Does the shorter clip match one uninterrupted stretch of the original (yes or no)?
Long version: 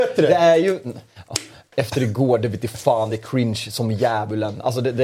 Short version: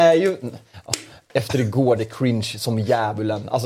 no